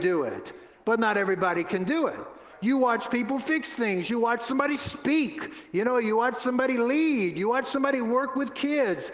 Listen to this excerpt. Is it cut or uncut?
uncut